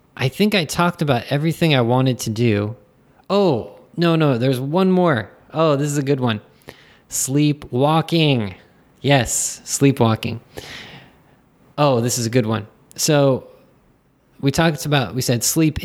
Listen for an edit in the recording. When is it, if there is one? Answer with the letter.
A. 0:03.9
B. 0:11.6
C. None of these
C